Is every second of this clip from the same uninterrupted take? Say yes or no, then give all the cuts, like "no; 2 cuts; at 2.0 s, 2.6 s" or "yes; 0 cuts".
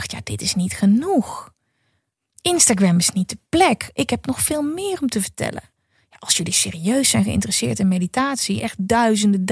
no; 1 cut; at 8.6 s